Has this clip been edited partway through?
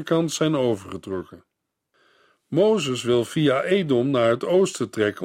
no; 0 cuts

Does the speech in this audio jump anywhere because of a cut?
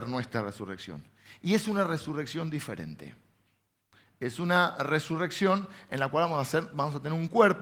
no; 0 cuts

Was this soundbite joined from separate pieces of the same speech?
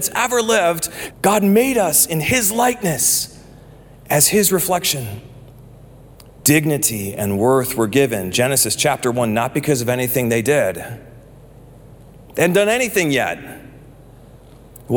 yes; 2 cuts; at 1.1 s, 6.4 s

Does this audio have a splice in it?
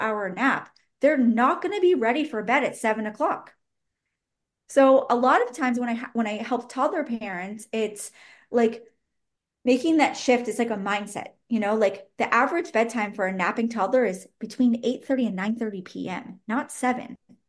no; 0 cuts

